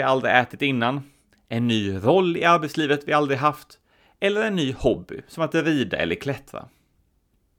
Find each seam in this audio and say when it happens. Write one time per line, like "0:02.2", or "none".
none